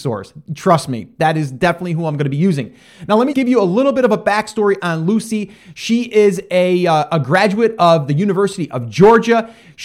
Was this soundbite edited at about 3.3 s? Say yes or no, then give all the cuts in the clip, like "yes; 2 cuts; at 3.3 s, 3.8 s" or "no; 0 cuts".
yes; 1 cut; at 3.3 s